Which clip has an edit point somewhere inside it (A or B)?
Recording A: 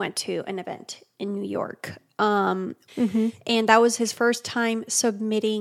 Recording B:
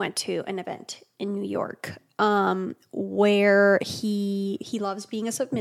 A